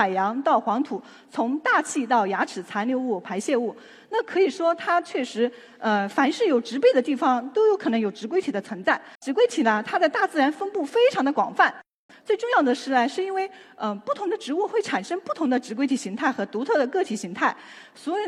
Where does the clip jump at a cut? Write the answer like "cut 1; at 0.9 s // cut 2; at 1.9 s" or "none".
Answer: cut 1; at 9.1 s // cut 2; at 12.1 s